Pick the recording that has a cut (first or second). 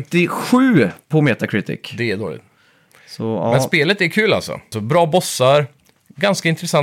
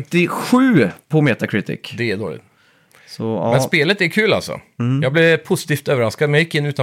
first